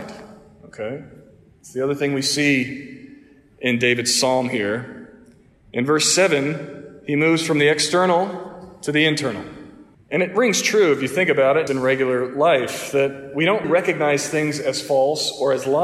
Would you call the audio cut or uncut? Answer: cut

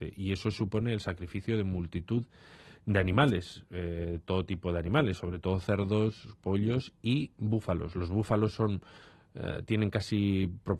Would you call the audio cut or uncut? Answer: uncut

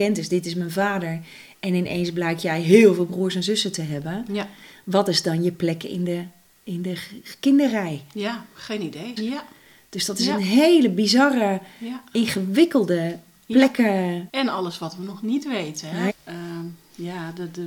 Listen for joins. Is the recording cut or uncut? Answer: cut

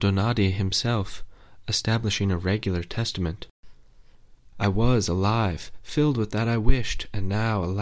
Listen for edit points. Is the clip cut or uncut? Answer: cut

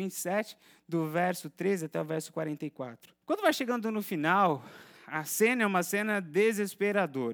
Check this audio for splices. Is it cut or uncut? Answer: cut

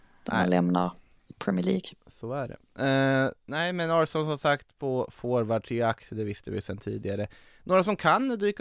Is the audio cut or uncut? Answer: uncut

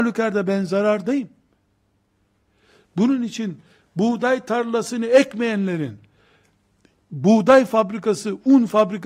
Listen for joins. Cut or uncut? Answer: uncut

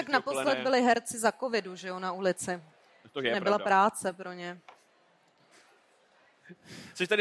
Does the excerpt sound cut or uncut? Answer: uncut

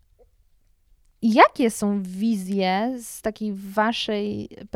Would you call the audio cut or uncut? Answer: uncut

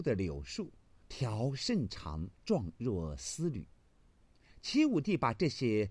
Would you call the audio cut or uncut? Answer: cut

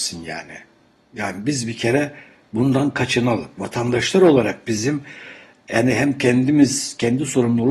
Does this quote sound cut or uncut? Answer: cut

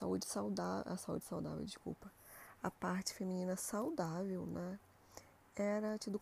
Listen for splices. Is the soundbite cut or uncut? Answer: uncut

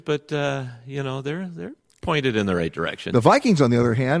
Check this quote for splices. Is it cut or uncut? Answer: uncut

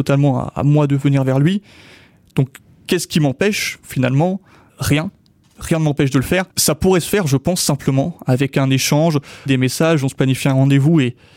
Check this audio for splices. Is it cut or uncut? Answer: cut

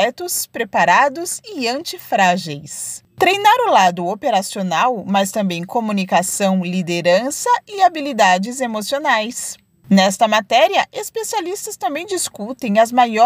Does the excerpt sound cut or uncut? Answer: uncut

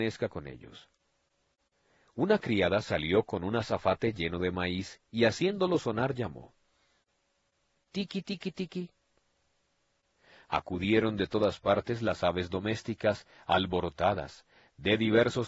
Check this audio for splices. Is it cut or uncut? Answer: uncut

